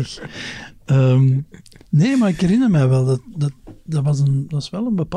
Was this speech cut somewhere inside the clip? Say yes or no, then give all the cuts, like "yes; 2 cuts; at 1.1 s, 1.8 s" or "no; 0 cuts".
no; 0 cuts